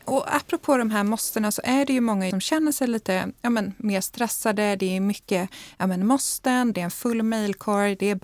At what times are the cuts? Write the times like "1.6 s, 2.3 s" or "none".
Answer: 2.3 s, 6.7 s